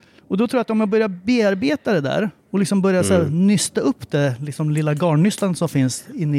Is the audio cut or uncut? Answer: uncut